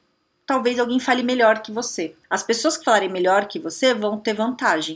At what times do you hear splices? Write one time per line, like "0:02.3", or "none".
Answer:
0:02.2